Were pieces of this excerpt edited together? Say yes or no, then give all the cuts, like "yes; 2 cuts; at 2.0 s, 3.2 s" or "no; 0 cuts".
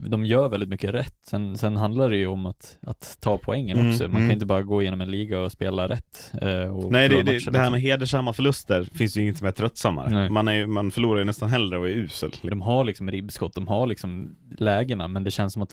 yes; 1 cut; at 12.5 s